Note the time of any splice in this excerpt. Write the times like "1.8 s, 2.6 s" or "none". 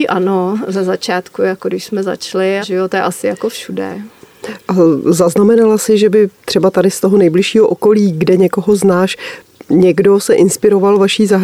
2.6 s